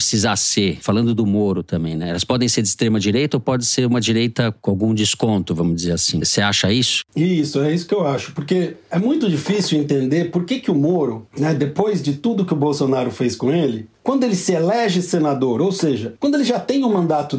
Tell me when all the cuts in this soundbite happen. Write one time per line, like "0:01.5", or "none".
none